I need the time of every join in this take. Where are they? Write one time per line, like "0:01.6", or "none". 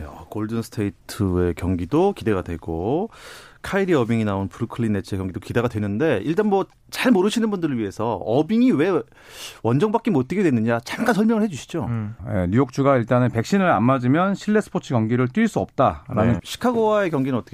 0:12.2
0:16.4